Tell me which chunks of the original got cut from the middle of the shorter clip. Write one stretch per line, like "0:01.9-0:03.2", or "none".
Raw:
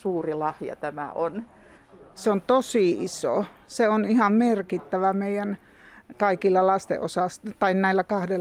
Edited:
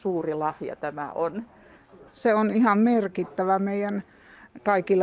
0:02.1-0:03.6